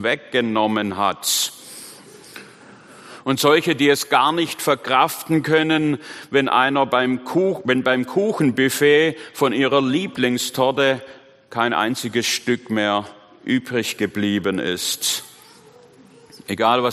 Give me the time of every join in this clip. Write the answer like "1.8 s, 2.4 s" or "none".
none